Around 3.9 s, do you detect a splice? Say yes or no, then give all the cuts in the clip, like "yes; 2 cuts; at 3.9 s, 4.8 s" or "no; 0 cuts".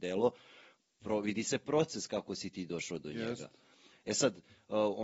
yes; 1 cut; at 3.9 s